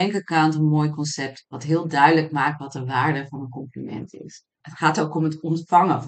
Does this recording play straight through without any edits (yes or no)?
no